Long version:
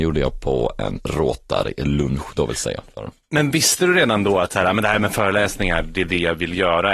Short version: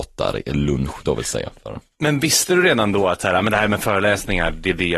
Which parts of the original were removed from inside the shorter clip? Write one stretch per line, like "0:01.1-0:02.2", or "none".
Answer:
none